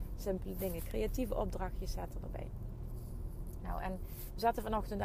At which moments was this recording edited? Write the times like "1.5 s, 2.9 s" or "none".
none